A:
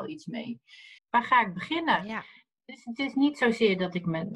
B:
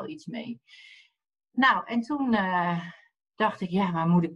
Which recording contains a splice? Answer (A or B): A